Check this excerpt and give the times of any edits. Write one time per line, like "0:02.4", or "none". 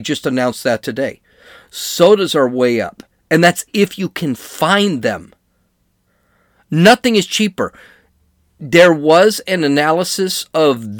none